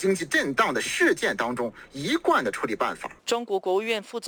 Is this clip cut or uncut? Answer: cut